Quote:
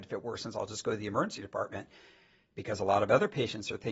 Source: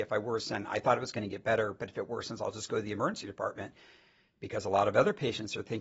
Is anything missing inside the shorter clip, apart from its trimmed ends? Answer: no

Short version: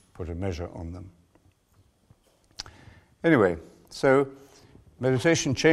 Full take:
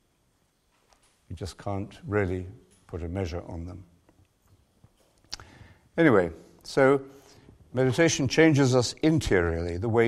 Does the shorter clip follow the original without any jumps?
yes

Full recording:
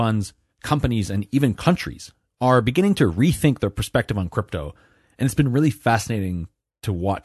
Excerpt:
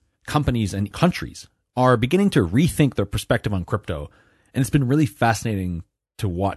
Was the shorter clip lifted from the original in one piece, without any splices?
no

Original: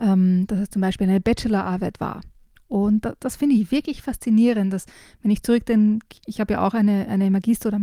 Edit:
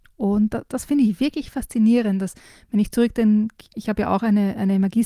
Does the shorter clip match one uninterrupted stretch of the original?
yes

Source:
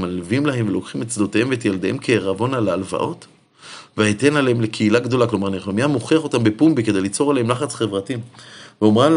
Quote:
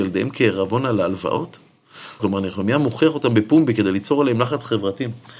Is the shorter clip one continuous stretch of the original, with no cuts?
no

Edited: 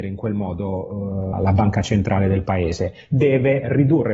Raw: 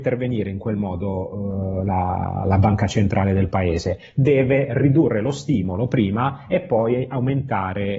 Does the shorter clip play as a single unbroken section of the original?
no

